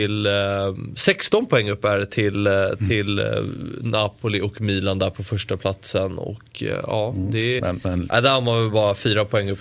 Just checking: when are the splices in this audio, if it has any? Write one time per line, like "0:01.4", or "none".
0:07.6